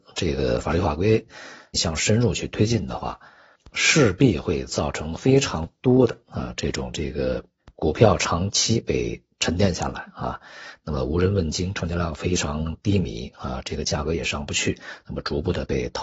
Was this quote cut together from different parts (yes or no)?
yes